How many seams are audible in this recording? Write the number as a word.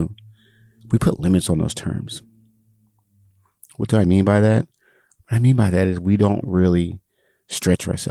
one